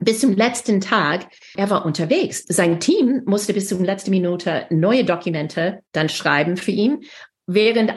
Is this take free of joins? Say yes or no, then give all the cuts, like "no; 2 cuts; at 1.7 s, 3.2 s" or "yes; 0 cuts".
no; 2 cuts; at 2.4 s, 5.9 s